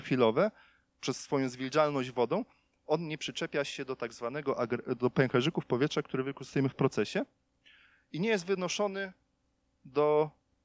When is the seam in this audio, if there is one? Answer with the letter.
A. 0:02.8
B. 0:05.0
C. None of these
B